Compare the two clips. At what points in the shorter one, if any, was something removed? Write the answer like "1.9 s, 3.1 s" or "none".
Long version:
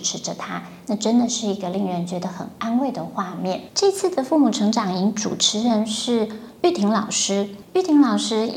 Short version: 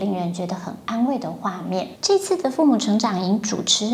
none